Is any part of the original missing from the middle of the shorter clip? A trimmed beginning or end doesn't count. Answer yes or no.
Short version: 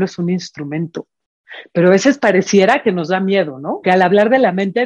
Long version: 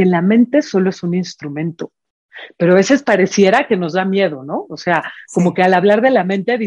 yes